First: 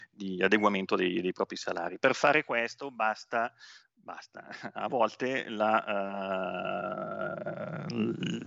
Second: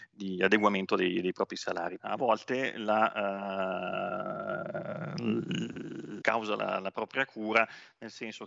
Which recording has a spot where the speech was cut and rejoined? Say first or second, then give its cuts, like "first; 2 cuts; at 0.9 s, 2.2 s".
second; 2 cuts; at 2.0 s, 6.2 s